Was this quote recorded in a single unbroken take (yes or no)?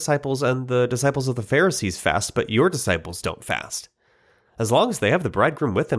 no